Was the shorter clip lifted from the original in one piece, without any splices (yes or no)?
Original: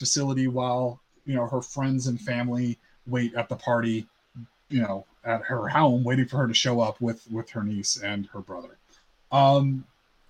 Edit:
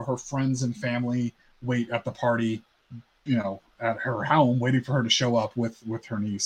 yes